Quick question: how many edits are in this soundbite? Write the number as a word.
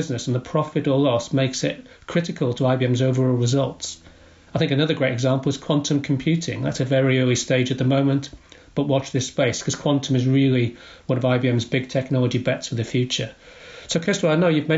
zero